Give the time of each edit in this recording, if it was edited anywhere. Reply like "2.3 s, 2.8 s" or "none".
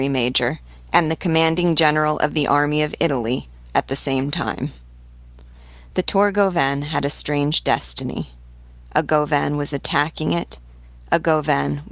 none